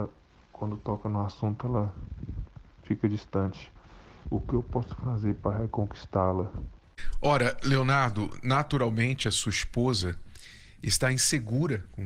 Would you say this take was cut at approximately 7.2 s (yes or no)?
no